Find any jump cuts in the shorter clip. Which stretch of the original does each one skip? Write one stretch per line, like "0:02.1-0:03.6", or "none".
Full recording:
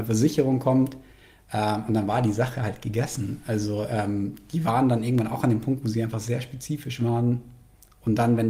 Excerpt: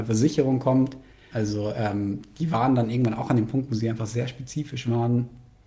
0:01.3-0:03.4